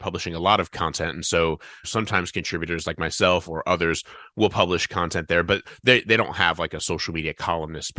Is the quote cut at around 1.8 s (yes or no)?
yes